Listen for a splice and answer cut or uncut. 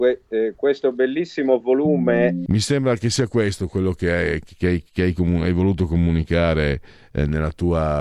cut